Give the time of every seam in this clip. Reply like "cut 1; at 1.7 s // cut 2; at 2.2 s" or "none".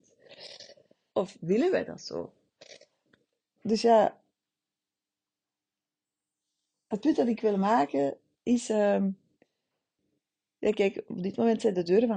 cut 1; at 1.1 s